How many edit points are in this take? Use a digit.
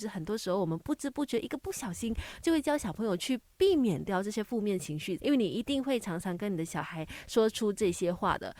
1